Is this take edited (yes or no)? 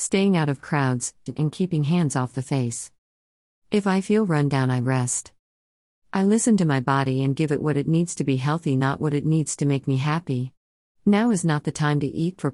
yes